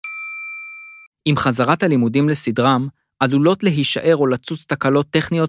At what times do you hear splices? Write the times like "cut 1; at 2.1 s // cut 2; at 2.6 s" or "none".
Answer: cut 1; at 1.1 s